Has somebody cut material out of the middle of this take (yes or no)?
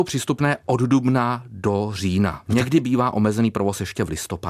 yes